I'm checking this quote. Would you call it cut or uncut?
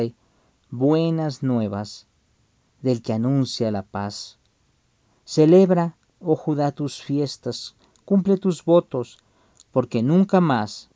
uncut